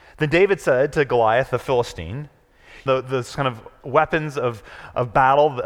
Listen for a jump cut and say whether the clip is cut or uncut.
cut